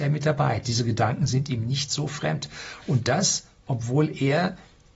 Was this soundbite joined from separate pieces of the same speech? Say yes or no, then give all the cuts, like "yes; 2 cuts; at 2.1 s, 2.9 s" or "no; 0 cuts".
no; 0 cuts